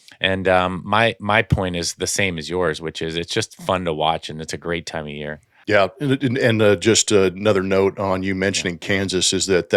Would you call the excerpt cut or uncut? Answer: uncut